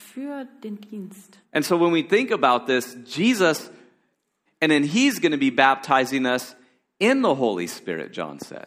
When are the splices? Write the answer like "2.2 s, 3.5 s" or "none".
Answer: 1.4 s, 4.5 s